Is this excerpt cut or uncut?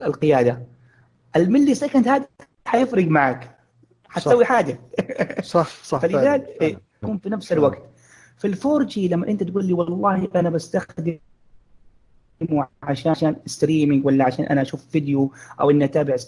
cut